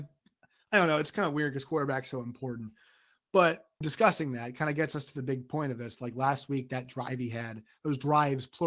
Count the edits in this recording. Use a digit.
1